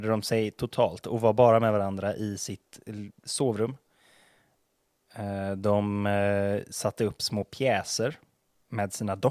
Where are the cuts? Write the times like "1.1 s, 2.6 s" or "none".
none

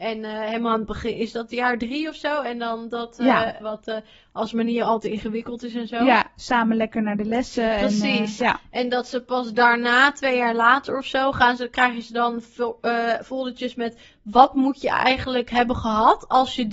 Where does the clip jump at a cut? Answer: 3.6 s, 8.4 s

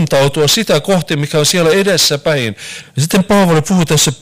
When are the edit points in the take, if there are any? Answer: 2.8 s

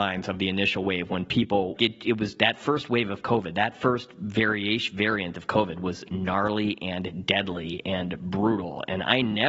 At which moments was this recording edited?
1.8 s

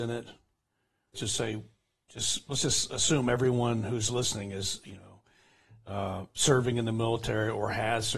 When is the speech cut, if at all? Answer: 1.1 s

